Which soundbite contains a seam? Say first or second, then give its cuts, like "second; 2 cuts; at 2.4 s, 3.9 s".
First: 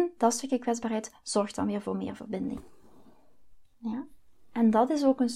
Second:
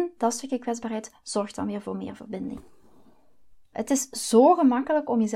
second; 1 cut; at 3.7 s